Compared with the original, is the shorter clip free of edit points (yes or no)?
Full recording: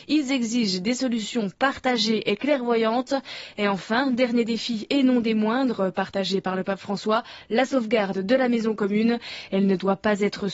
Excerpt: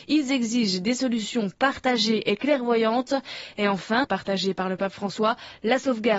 no